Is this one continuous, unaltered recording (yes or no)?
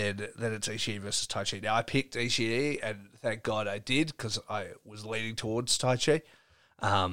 yes